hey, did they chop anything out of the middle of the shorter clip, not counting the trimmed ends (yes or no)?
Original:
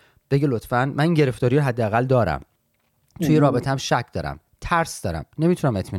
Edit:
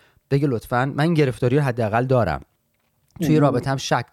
no